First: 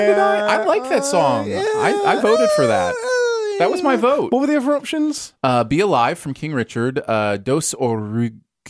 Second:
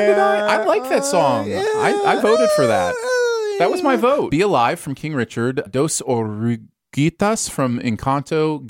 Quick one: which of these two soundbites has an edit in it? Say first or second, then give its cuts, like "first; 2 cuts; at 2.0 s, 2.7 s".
second; 2 cuts; at 4.3 s, 5.7 s